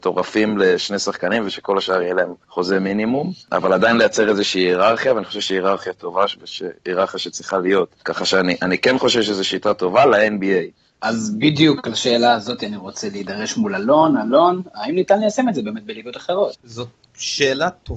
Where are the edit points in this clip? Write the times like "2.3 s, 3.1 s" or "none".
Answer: 11.0 s, 16.5 s